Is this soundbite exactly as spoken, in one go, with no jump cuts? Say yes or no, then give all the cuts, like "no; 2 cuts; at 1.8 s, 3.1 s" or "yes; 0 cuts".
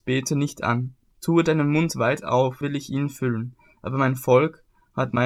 no; 2 cuts; at 1.1 s, 2.6 s